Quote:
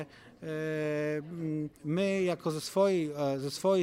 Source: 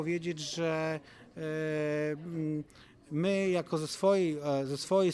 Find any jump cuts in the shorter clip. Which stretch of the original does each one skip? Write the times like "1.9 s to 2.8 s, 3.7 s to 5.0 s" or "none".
2.7 s to 3.0 s